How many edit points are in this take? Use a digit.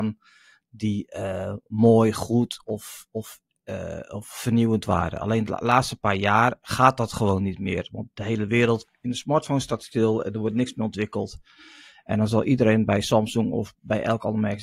0